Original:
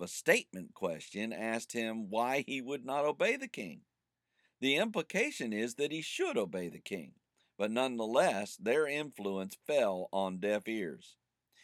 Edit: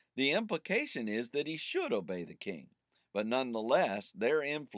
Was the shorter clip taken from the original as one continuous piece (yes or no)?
yes